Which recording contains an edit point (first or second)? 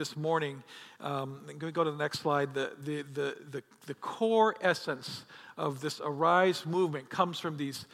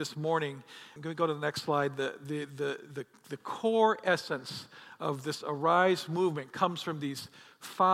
second